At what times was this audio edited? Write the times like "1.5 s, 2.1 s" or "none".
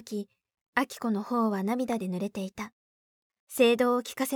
3.3 s